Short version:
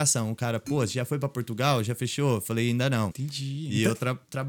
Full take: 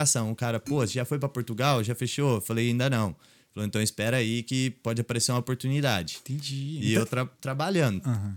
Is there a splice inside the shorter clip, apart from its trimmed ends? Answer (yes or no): yes